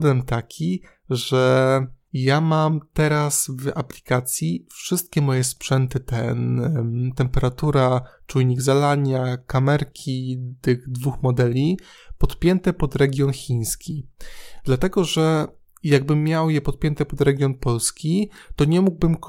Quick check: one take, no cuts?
yes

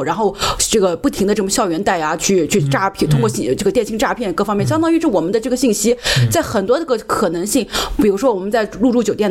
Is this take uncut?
yes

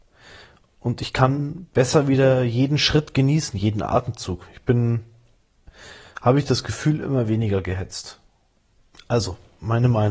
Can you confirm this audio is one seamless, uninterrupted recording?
no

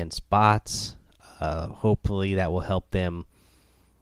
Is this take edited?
no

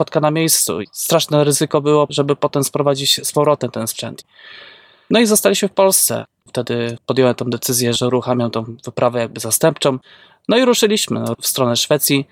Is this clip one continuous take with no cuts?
yes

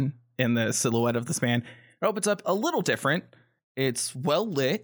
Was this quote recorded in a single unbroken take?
no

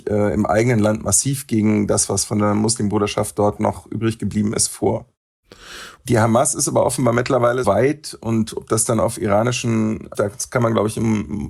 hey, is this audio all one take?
no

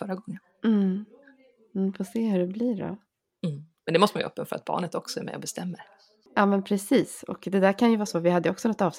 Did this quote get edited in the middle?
no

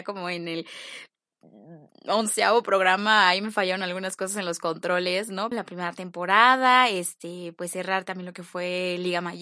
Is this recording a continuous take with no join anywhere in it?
no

